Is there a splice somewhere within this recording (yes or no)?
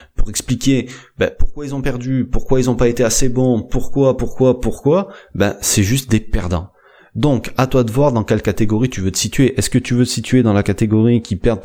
no